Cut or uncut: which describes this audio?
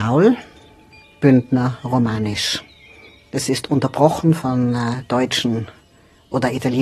cut